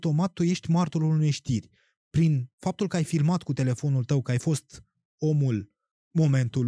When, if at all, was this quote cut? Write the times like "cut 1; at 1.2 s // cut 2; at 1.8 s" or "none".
none